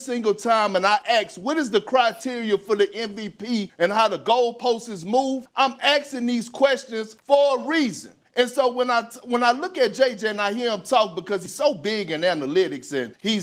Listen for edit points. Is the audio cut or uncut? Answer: uncut